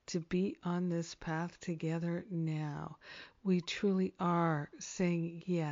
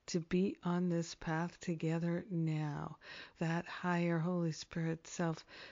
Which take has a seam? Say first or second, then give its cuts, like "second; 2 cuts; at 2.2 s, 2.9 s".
second; 1 cut; at 3.3 s